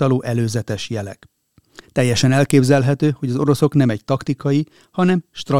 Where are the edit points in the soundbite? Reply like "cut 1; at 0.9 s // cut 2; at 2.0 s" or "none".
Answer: cut 1; at 1.8 s